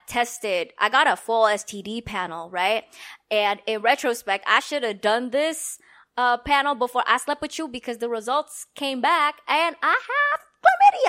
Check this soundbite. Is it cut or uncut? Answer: uncut